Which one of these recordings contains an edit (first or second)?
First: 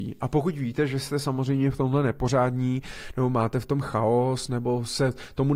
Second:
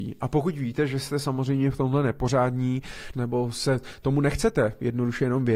second